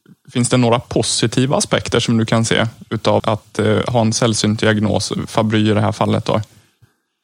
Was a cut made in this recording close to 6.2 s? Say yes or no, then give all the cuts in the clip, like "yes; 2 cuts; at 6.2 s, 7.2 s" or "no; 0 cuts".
no; 1 cut; at 3.2 s